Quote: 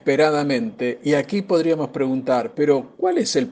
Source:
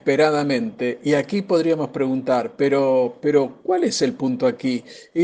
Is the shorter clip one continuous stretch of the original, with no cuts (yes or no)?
no